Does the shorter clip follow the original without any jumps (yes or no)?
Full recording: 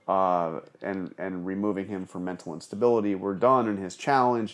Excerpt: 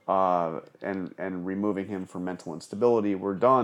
yes